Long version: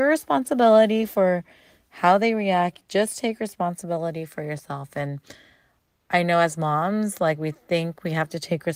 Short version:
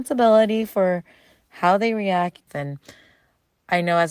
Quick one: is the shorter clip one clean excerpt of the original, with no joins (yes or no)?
no